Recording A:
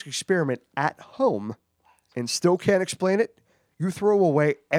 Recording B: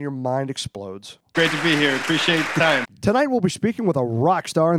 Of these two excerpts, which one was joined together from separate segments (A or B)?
B